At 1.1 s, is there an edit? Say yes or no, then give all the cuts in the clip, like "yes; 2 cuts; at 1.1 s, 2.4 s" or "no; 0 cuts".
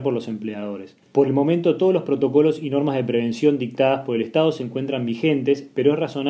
no; 0 cuts